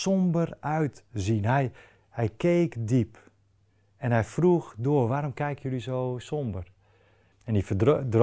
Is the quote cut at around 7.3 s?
yes; 1 cut; at 7.3 s

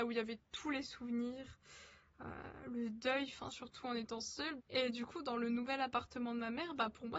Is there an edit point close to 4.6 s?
yes; 2 cuts; at 3.5 s, 4.6 s

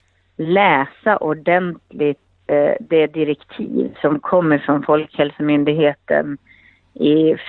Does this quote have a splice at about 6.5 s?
no; 0 cuts

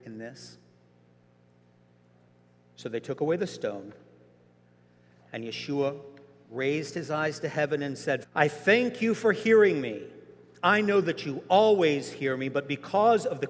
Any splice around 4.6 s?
no; 1 cut; at 8.2 s

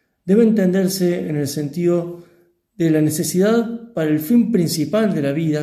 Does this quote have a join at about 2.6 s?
no; 0 cuts

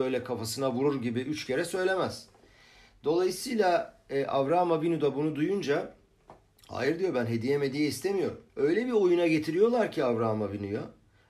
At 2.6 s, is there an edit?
no; 1 cut; at 8.5 s

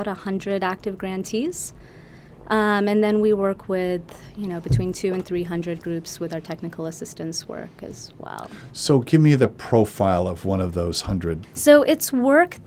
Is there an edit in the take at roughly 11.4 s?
yes; 1 cut; at 11.4 s

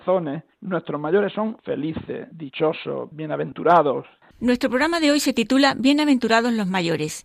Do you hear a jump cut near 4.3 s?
yes; 1 cut; at 4.3 s

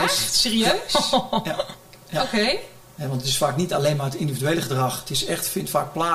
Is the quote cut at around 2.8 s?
yes; 1 cut; at 2.8 s

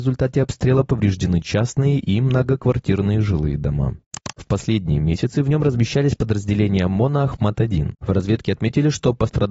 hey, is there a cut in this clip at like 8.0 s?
yes; 2 cuts; at 4.3 s, 8.0 s

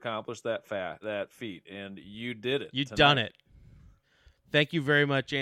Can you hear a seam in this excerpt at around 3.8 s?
no; 1 cut; at 1.0 s

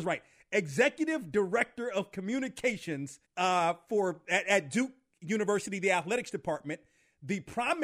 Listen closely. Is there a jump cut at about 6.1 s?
no; 1 cut; at 3.2 s

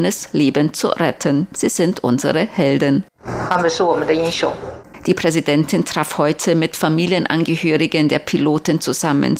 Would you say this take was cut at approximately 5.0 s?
no; 0 cuts

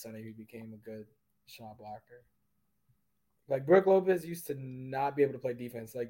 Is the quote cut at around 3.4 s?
yes; 1 cut; at 3.4 s

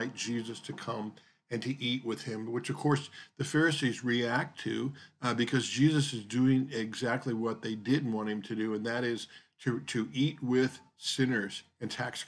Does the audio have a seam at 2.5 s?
no; 0 cuts

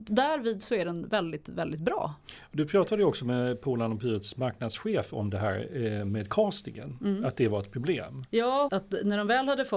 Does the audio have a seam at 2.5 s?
no; 1 cut; at 8.7 s

